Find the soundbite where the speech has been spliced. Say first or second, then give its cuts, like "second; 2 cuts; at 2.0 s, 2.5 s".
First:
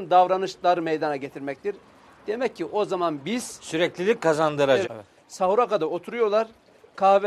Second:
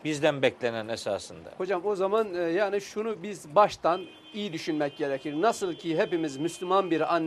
first; 1 cut; at 4.8 s